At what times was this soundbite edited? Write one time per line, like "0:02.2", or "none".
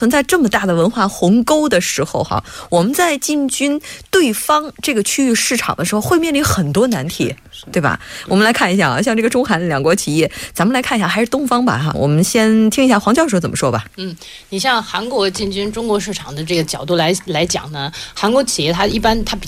0:11.9